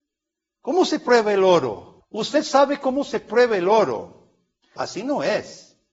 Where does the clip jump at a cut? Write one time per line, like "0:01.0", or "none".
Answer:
0:02.0
0:04.8